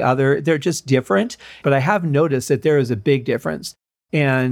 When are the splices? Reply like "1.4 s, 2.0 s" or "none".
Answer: 1.6 s